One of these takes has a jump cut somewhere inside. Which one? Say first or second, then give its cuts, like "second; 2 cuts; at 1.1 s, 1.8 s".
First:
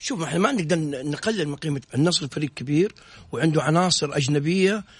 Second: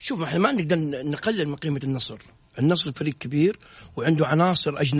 first; 1 cut; at 1.8 s